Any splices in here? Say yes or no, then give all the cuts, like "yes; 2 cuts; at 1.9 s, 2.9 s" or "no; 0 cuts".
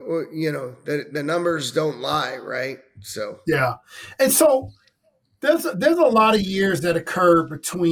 no; 0 cuts